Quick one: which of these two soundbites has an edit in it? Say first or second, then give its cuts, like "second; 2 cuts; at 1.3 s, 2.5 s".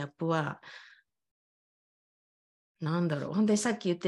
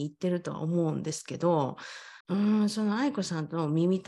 second; 1 cut; at 2.2 s